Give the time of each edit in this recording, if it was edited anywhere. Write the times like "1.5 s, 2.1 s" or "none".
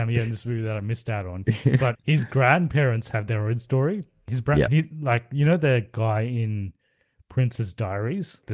1.9 s, 4.7 s